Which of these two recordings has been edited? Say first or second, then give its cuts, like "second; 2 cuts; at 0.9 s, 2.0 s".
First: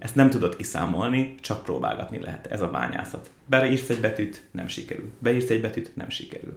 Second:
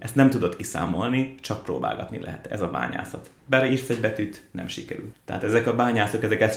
second; 1 cut; at 5.1 s